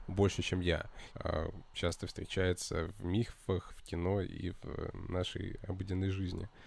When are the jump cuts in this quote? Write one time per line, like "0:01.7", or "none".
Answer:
0:01.1